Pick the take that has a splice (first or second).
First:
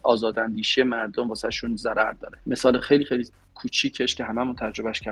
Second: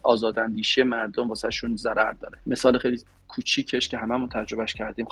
second